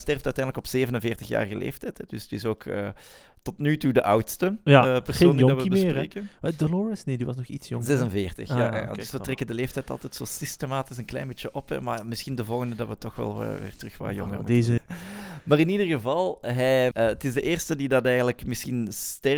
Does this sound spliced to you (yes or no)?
yes